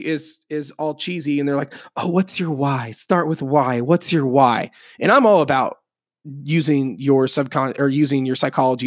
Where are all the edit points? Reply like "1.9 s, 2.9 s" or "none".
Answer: none